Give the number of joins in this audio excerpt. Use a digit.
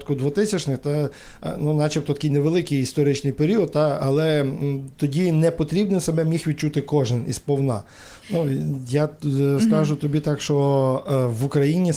1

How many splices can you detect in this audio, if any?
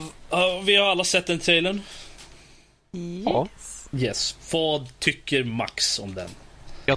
0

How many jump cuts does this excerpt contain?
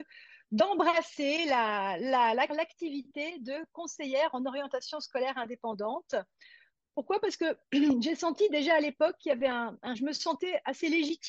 2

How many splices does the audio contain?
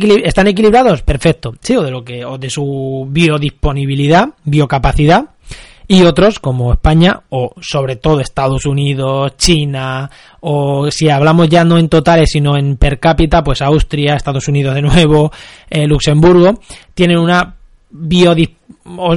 1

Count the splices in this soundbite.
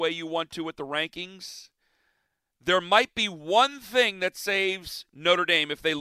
0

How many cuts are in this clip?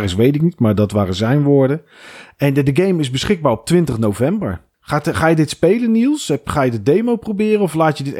0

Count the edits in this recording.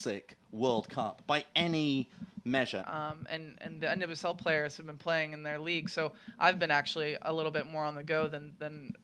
1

